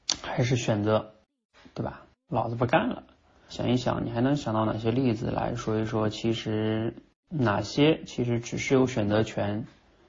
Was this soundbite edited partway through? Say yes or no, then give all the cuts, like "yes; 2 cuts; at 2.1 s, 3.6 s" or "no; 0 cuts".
yes; 1 cut; at 3.5 s